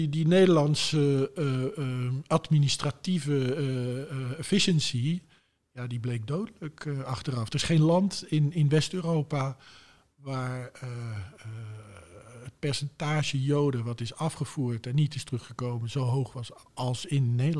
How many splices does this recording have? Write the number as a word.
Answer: zero